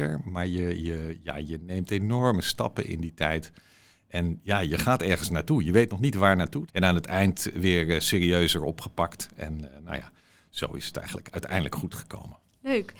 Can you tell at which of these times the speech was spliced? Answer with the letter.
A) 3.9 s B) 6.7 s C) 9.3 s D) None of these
B